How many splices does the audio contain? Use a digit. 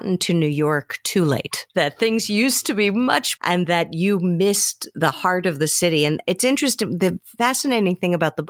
1